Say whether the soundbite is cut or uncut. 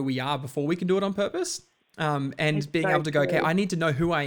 uncut